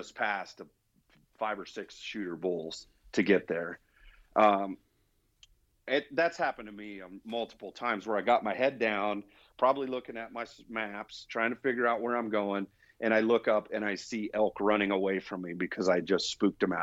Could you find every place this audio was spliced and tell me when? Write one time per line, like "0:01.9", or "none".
none